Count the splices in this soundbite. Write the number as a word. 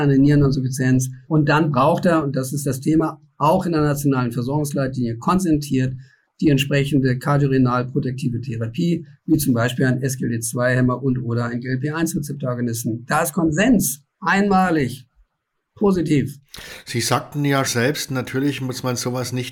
one